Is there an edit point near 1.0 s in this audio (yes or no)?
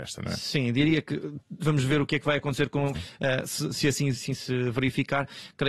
no